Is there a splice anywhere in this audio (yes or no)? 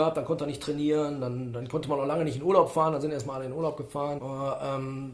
yes